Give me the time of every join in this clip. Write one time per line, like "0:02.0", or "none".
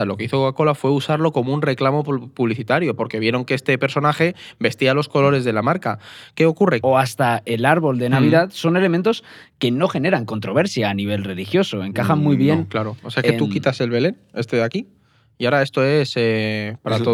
0:06.8